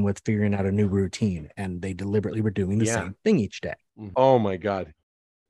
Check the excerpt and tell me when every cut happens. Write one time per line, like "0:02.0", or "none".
0:04.1